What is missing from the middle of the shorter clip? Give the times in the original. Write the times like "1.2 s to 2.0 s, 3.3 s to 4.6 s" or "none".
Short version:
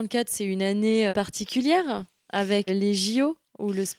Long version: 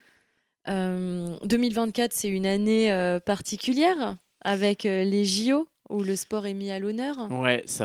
2.9 s to 3.2 s, 4.8 s to 5.0 s